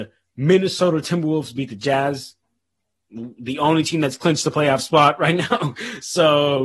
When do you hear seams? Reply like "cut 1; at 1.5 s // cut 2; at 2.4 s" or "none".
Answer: none